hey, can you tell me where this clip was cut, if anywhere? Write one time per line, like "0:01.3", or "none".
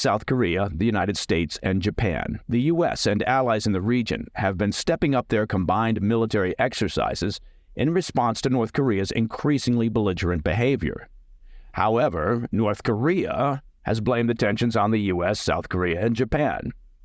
0:02.4